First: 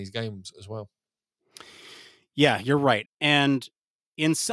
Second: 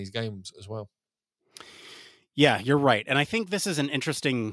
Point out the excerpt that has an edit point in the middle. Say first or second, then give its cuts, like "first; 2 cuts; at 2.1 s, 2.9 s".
first; 1 cut; at 3.1 s